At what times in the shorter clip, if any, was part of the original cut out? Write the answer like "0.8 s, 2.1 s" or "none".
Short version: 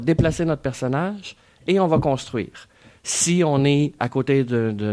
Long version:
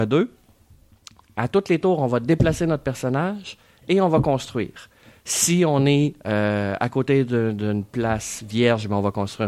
4.0 s